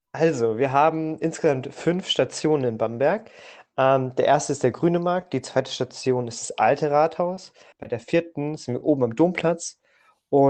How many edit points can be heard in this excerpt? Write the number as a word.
one